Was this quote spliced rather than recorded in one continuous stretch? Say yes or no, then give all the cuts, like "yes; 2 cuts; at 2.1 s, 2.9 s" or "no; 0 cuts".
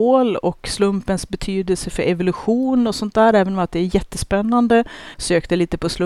yes; 1 cut; at 5.1 s